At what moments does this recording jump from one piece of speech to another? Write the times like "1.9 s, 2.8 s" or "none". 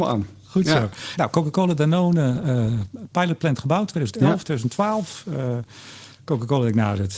1.2 s